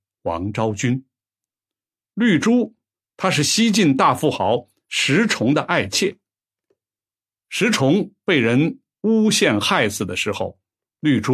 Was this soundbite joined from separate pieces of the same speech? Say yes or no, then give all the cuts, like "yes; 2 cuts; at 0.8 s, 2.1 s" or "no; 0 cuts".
no; 0 cuts